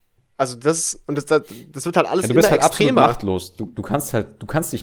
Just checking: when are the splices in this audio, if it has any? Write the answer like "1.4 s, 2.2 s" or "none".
none